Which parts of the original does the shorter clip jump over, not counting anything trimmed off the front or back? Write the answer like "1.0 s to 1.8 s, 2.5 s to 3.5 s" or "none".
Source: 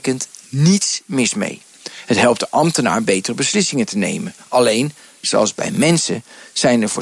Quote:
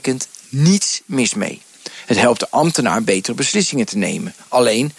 none

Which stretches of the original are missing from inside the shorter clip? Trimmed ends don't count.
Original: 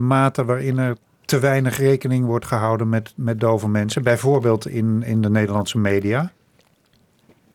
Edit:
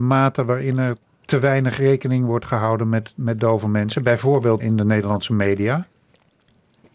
4.6 s to 5.0 s

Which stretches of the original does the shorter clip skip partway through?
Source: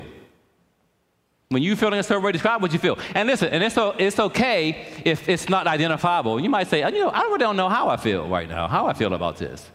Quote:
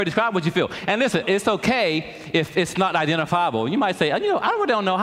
3.5 s to 3.9 s

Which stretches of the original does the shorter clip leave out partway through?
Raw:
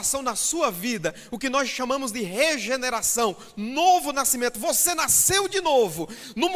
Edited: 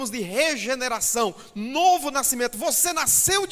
none

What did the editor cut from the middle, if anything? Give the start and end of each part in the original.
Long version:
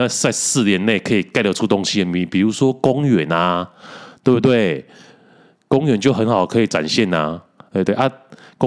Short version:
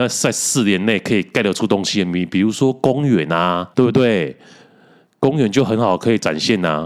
3.7 s to 4.2 s

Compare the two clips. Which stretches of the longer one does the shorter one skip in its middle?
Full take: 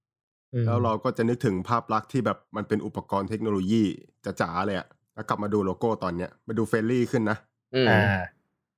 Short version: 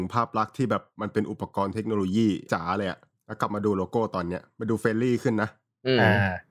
4.0 s to 4.3 s

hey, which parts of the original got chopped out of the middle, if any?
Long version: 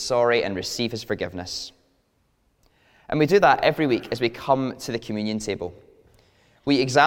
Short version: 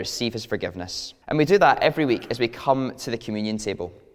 1.8 s to 3.0 s

